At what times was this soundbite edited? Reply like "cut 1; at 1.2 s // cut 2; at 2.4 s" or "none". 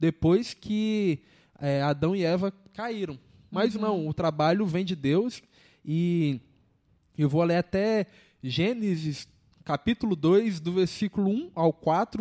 none